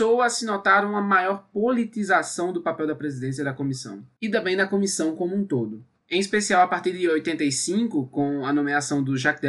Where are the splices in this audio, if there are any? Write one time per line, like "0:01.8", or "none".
0:06.0